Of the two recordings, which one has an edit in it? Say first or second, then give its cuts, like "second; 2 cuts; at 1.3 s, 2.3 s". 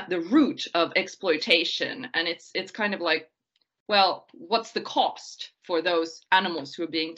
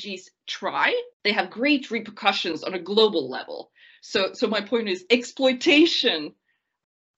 second; 1 cut; at 1.1 s